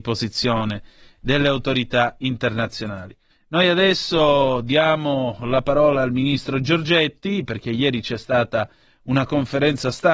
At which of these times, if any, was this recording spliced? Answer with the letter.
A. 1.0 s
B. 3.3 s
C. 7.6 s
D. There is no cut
B